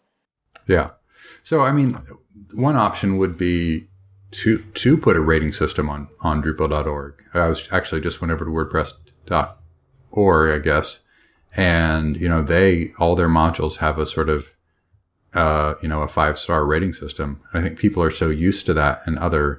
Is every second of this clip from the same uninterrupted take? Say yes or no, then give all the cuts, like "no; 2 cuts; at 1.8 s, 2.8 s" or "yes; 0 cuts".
yes; 0 cuts